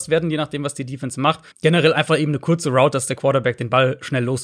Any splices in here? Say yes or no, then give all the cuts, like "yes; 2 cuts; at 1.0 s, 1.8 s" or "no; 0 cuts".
yes; 1 cut; at 1.5 s